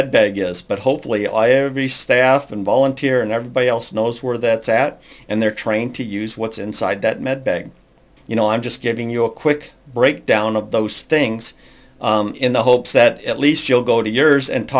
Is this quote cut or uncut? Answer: cut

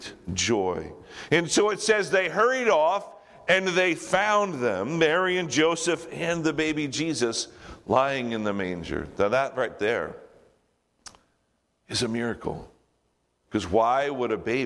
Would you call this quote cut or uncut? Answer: uncut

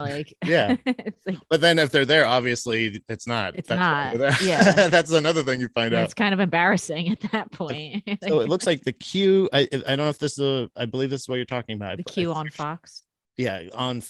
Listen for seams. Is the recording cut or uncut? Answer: uncut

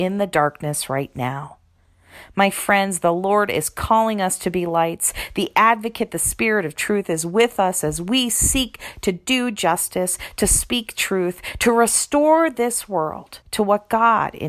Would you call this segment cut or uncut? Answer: cut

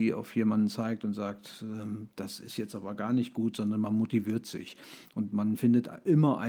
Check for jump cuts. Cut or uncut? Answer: uncut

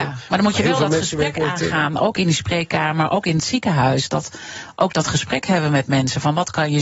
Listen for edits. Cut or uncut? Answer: uncut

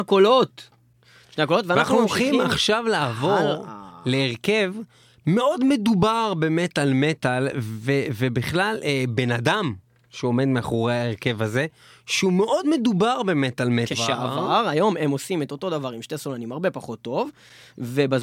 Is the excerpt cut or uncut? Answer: cut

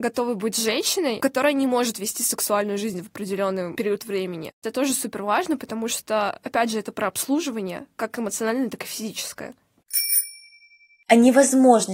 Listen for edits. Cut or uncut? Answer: uncut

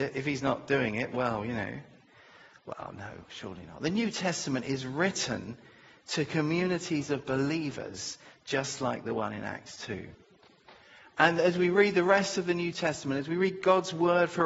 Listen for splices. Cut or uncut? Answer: uncut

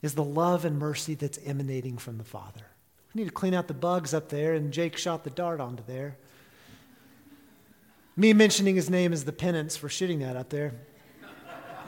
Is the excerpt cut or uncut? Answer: cut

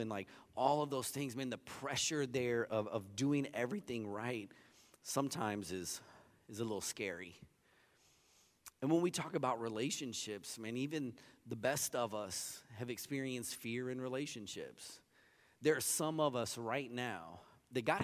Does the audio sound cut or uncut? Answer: uncut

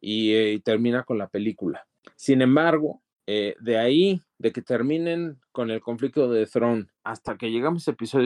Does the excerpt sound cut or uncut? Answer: uncut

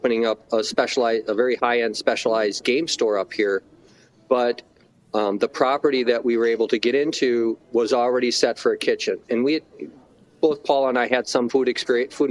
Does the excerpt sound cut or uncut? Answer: uncut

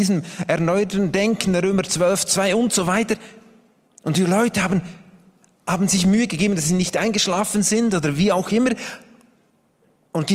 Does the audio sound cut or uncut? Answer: uncut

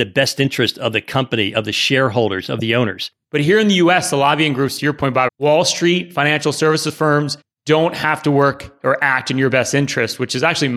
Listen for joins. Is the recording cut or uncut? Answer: cut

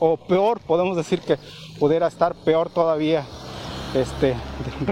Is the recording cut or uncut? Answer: uncut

